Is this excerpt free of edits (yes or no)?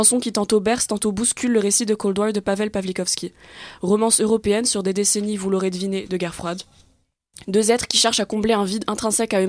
yes